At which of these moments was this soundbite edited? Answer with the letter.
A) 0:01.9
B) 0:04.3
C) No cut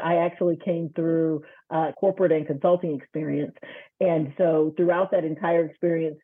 A